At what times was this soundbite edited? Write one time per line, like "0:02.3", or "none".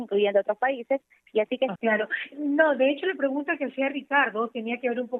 0:01.8

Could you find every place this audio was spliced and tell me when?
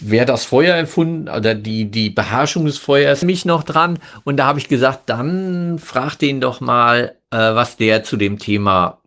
0:03.2

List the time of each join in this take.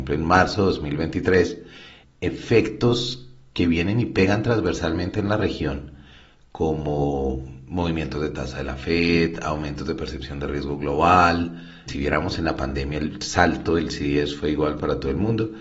0:02.0
0:11.9

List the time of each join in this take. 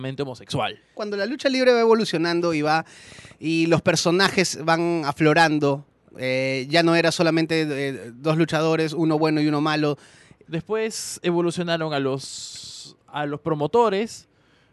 0:00.9
0:10.4
0:13.1

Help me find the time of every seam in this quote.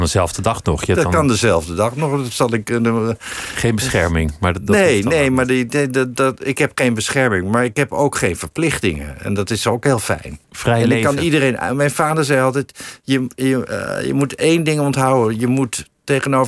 0:10.4

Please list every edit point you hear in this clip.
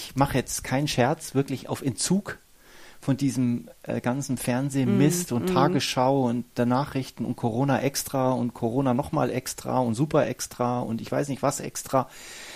none

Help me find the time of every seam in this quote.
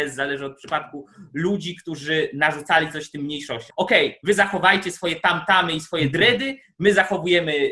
0:03.7

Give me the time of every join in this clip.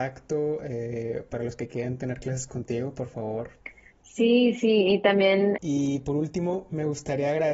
0:05.6

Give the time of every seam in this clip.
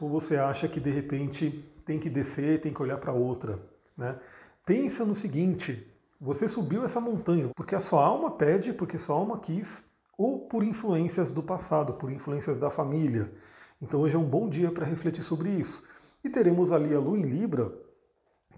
0:07.5

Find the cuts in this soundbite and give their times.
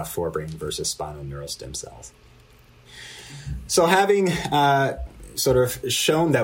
none

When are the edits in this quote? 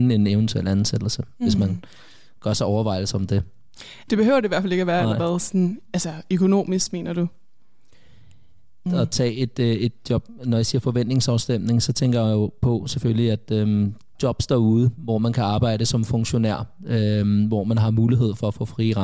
0:04.1
0:08.9
0:14.1

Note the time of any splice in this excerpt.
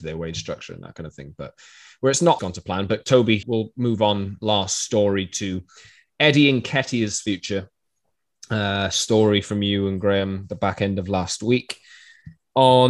0:02.4
0:03.4

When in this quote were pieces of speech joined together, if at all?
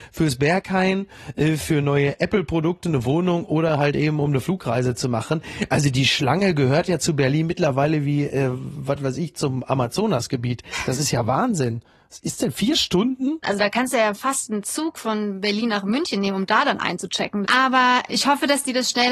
0:13.4
0:17.4

